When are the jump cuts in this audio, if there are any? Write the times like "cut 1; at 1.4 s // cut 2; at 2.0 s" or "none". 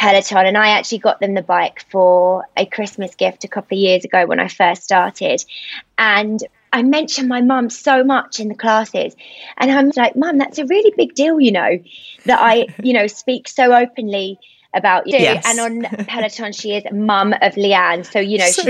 cut 1; at 9.9 s // cut 2; at 15.1 s